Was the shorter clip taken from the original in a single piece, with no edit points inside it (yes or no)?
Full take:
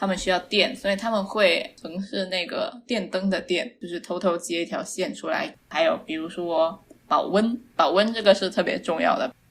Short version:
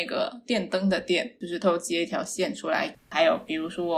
no